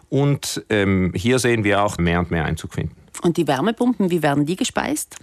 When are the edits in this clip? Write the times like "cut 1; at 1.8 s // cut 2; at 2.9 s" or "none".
cut 1; at 2.0 s